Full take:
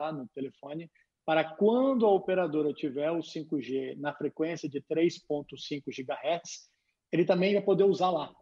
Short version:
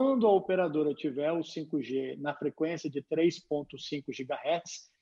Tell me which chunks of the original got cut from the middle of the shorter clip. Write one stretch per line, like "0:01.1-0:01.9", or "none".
none